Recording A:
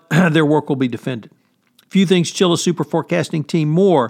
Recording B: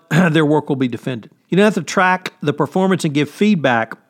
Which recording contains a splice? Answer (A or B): B